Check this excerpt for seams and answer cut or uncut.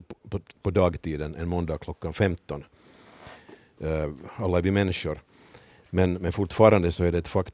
uncut